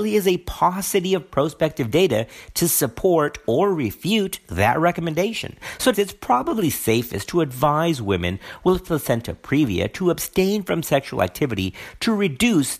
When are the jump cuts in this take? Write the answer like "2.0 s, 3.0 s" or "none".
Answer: 5.9 s